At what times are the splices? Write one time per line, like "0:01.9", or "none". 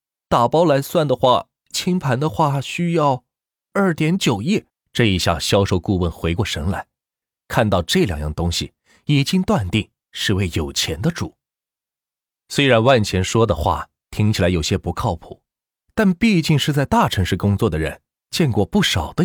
0:01.7
0:04.7